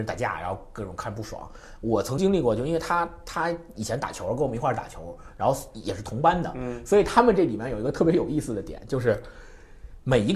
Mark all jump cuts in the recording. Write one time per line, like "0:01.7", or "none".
0:02.2